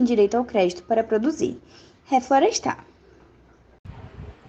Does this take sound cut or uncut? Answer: cut